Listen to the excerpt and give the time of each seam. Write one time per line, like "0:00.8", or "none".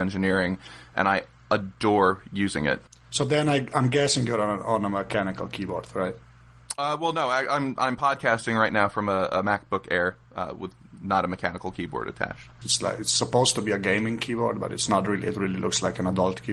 0:12.6